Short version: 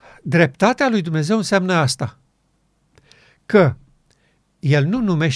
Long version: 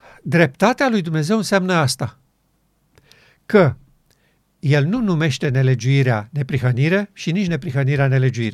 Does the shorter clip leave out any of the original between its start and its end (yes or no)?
no